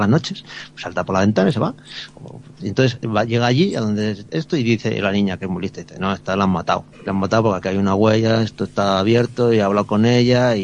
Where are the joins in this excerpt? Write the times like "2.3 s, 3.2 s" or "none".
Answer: 2.6 s, 6.9 s